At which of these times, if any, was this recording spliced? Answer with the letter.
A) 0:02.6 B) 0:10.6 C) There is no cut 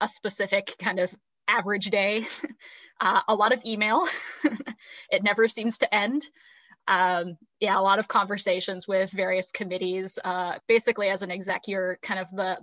B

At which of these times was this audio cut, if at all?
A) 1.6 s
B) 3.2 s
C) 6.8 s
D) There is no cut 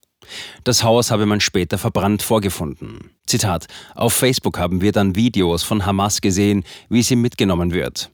B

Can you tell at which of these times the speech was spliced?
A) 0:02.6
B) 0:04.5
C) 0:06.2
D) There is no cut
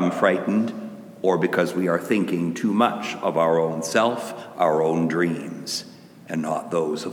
B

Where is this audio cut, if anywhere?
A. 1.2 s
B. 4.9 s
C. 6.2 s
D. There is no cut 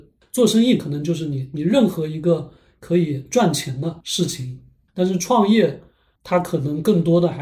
B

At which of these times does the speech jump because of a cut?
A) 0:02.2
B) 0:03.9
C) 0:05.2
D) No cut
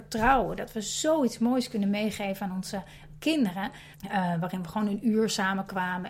B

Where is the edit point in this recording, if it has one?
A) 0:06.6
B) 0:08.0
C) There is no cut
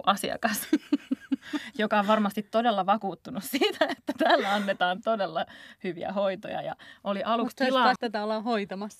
B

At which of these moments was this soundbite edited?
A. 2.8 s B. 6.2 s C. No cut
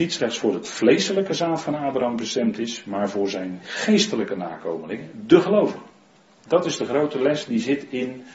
C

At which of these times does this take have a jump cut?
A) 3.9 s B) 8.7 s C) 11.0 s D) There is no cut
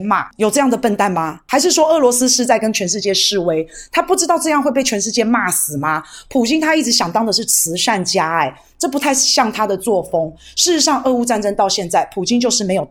D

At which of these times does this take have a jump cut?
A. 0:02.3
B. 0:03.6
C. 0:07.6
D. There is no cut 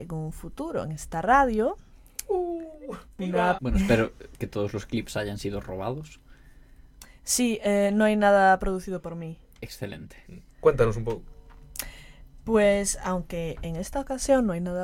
B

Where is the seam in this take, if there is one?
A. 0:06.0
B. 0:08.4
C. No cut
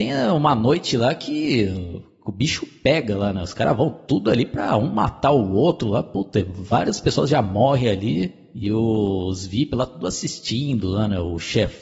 C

